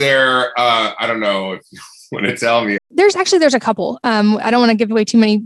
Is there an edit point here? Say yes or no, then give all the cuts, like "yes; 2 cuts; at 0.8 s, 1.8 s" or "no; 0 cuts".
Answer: yes; 1 cut; at 2.8 s